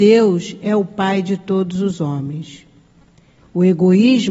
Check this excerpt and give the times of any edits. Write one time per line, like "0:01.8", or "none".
0:03.4